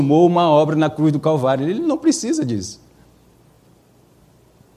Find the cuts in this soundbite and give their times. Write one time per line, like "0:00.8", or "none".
none